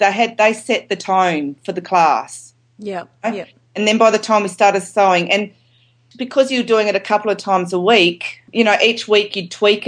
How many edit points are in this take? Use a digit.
0